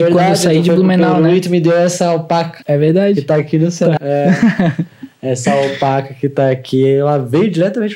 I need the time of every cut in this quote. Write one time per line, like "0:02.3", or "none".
0:04.0